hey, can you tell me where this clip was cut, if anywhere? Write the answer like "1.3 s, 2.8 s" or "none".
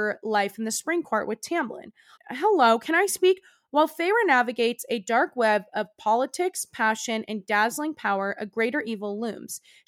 2.2 s